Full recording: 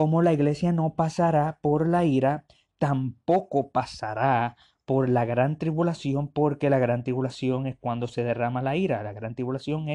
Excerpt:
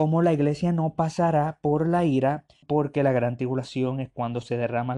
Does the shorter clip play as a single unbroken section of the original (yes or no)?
no